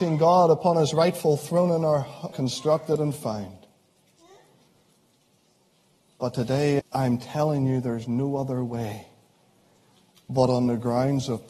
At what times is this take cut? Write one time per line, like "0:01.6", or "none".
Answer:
0:02.3
0:06.8